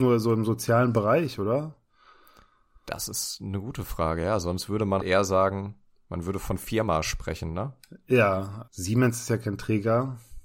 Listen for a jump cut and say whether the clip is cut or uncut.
cut